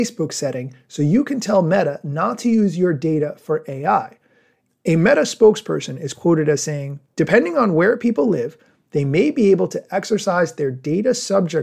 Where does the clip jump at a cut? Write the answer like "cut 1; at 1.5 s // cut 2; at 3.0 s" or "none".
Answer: cut 1; at 4.7 s // cut 2; at 7.0 s